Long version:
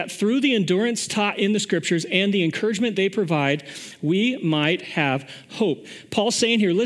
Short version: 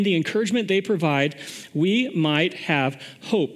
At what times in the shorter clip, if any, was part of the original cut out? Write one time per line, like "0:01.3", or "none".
none